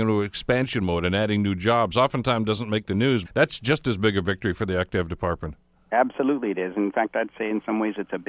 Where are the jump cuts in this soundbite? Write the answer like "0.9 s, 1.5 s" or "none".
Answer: 3.2 s

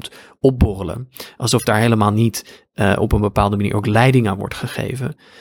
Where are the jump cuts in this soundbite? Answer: none

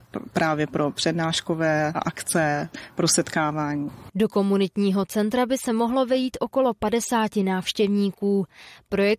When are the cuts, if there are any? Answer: none

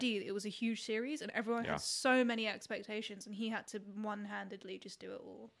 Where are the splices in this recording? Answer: none

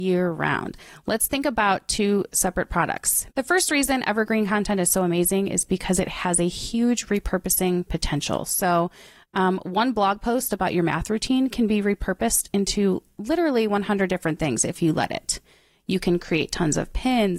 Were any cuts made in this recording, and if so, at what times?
3.3 s

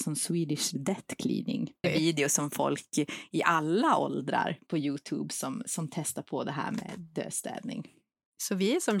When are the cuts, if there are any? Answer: 1.8 s

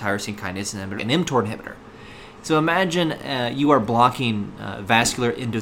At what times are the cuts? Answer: 1.0 s, 2.4 s

